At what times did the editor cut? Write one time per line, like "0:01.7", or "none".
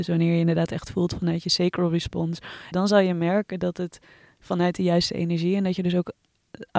0:02.7